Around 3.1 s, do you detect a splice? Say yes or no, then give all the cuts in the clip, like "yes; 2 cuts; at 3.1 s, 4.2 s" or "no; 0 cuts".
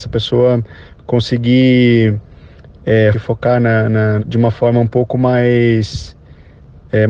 yes; 2 cuts; at 3.1 s, 4.2 s